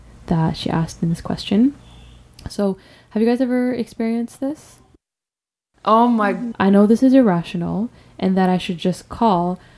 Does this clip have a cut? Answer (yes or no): yes